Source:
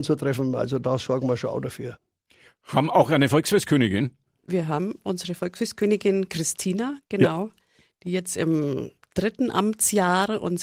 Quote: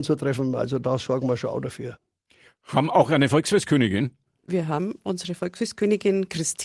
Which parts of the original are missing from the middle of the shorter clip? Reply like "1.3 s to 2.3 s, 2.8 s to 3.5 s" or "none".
none